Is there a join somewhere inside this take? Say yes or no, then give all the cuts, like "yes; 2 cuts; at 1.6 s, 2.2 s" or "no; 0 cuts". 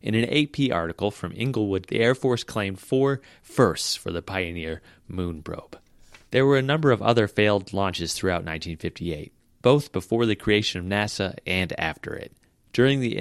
yes; 2 cuts; at 1.9 s, 6.3 s